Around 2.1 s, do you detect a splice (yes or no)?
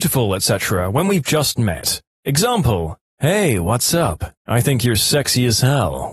no